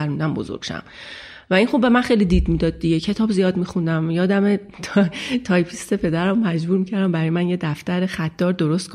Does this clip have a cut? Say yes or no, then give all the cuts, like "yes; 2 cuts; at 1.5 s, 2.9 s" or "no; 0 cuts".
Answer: no; 0 cuts